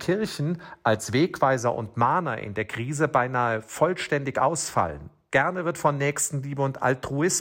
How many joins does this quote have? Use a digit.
1